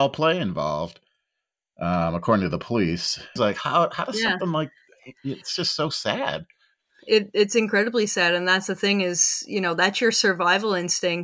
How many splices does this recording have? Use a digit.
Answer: 1